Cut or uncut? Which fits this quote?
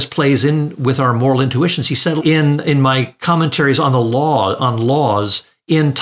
cut